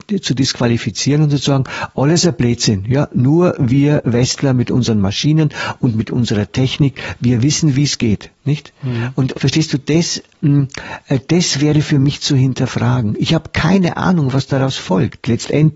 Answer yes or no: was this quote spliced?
yes